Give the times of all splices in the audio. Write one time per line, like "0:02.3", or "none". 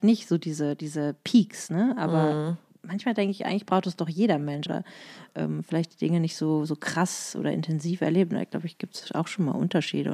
0:04.7